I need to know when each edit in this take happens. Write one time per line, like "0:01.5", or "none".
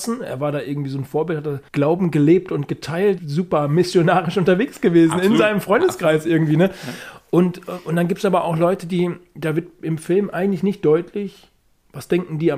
0:01.7
0:03.2